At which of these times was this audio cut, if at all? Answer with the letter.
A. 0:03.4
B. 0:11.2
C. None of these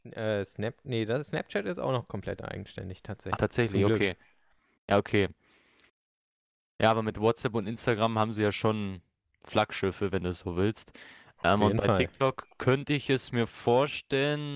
A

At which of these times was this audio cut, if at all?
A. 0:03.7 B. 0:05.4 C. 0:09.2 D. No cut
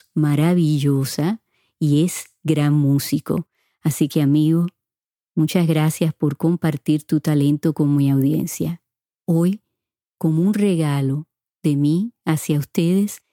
C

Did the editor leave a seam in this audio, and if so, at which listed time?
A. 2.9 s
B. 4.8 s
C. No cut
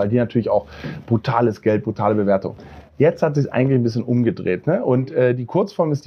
C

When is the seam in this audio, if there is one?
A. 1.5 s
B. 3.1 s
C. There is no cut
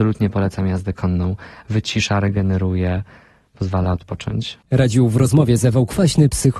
C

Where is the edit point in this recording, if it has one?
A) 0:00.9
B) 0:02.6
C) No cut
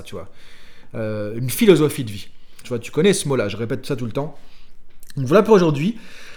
B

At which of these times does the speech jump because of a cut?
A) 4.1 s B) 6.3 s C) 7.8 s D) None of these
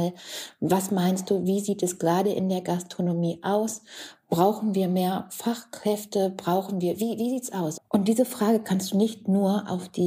C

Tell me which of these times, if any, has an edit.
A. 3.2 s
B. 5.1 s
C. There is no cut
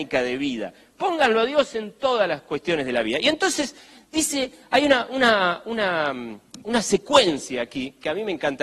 C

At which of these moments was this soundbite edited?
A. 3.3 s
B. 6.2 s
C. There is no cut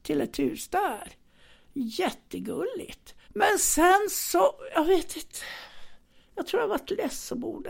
A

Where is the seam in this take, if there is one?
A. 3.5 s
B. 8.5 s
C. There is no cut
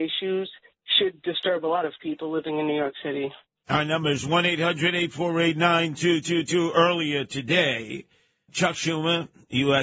B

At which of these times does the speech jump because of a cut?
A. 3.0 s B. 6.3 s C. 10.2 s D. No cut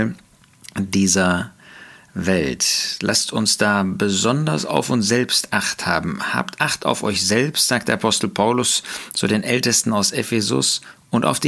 D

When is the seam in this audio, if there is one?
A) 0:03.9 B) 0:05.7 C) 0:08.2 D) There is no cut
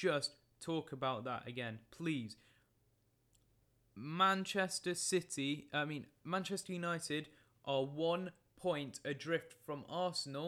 D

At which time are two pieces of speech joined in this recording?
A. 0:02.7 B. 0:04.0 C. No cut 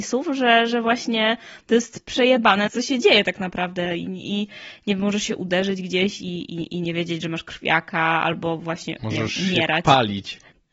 A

